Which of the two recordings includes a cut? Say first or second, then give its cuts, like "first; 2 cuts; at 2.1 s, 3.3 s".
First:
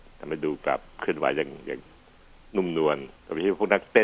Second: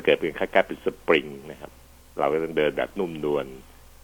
first; 1 cut; at 3.1 s